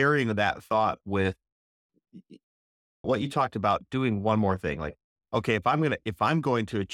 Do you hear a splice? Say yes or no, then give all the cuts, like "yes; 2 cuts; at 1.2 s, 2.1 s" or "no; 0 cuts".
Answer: yes; 1 cut; at 3.0 s